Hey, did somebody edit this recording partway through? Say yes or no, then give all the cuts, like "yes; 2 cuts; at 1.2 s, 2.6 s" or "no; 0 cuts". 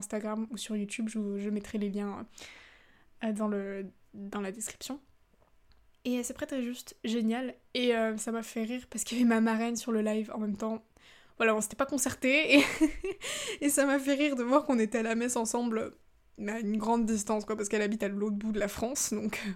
no; 0 cuts